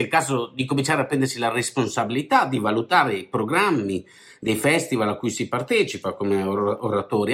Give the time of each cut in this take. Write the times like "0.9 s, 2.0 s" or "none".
none